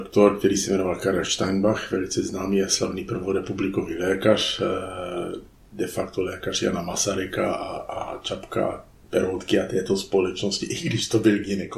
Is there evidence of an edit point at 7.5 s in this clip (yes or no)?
no